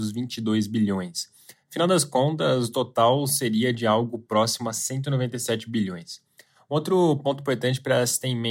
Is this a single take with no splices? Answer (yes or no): yes